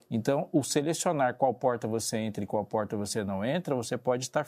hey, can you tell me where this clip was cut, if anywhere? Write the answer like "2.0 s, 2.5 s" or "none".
none